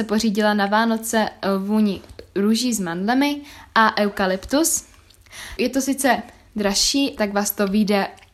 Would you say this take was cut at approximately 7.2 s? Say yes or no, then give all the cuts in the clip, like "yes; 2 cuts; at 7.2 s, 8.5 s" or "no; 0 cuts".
yes; 2 cuts; at 5.6 s, 7.2 s